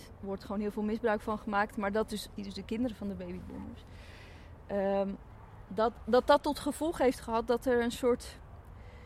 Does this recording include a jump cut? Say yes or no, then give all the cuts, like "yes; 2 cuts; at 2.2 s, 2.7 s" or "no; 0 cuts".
yes; 1 cut; at 2.4 s